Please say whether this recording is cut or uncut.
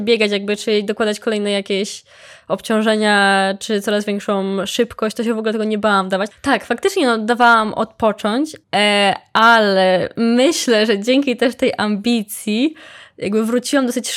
cut